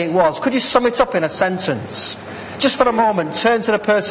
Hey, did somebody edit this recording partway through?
no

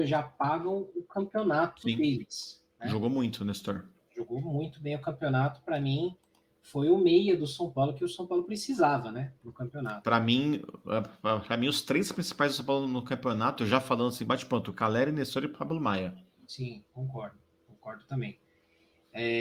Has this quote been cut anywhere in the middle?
no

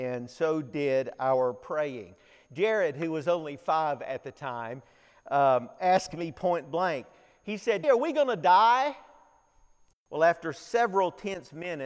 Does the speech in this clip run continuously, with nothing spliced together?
no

